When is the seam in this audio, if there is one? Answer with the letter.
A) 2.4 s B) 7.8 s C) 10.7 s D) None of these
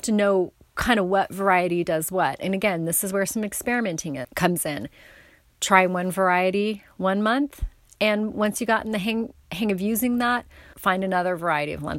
C